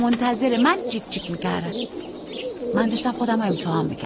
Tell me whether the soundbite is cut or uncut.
uncut